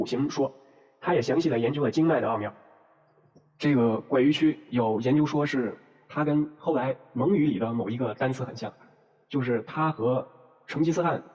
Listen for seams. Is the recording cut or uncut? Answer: uncut